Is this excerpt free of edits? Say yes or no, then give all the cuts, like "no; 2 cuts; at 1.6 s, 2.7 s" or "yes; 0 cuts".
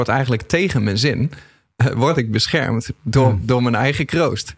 yes; 0 cuts